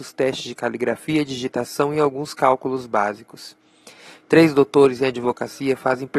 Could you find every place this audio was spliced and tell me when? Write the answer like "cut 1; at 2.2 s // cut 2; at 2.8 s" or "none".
cut 1; at 4.2 s